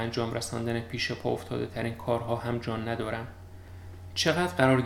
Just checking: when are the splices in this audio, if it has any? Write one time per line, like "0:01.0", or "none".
none